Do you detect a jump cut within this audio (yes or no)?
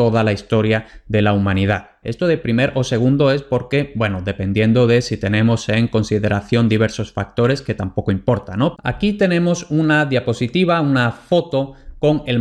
yes